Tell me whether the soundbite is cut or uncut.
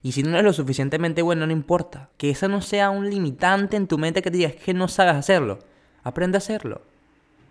cut